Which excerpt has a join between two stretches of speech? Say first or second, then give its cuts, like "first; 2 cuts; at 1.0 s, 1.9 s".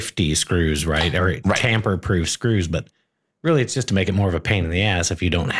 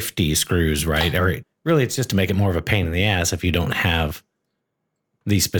second; 1 cut; at 1.4 s